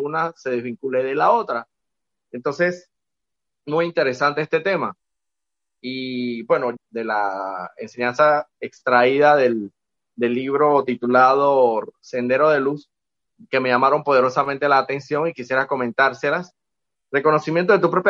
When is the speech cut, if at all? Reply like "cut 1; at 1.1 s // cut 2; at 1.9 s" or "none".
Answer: cut 1; at 6.8 s // cut 2; at 17.0 s